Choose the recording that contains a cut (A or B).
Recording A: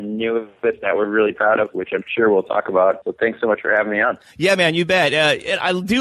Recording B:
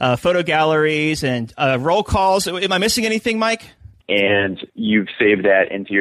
B